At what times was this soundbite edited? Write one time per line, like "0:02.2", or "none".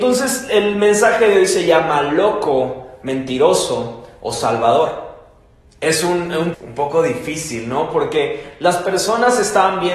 0:06.5